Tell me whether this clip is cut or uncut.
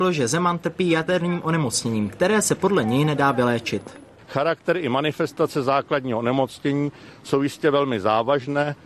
uncut